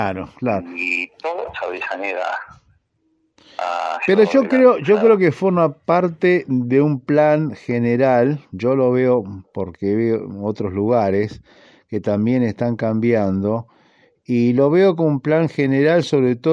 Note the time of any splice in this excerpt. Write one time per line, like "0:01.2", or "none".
0:01.5